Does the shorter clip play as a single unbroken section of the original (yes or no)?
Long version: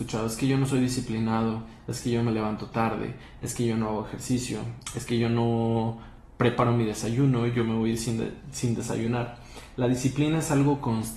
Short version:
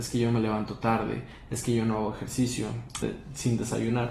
no